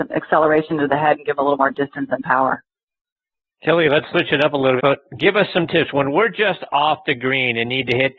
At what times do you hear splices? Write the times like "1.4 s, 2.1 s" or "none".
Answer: 4.8 s